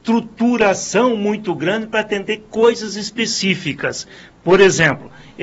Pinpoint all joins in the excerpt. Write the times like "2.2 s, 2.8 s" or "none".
none